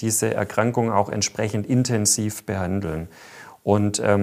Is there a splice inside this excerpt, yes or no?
no